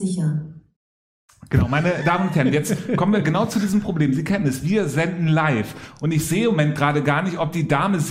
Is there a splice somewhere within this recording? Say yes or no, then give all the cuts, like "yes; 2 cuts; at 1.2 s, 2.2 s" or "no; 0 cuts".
no; 0 cuts